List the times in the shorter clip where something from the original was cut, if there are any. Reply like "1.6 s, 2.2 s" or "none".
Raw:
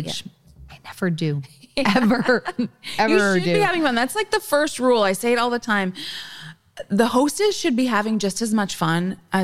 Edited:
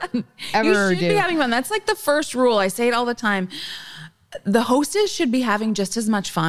none